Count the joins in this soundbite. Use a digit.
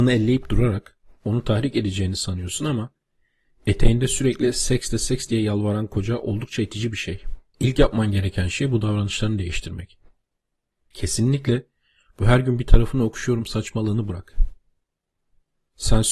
2